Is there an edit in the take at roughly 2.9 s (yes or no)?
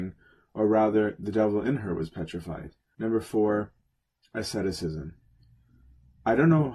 yes